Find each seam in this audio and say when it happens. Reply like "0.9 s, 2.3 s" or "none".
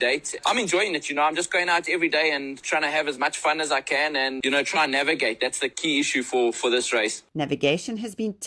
none